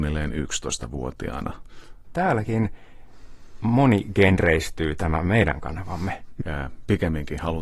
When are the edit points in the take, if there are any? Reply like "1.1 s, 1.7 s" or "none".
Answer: 2.0 s, 6.4 s